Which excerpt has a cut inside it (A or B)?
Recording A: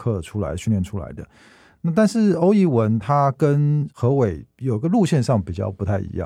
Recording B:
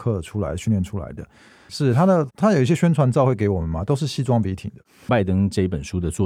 B